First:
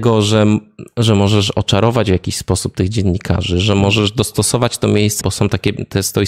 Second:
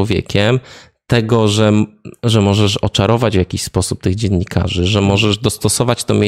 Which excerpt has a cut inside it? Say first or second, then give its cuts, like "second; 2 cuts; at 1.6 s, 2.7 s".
first; 1 cut; at 5.2 s